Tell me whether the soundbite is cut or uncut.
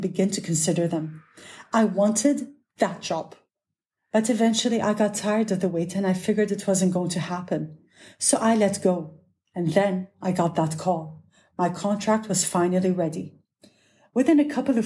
uncut